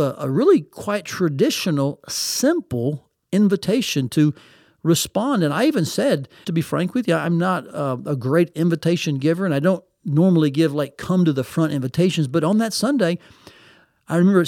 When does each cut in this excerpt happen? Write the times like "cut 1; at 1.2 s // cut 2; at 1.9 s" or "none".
cut 1; at 6.4 s